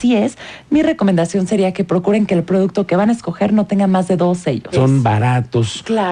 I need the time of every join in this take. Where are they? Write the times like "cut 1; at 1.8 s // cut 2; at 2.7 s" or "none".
cut 1; at 4.7 s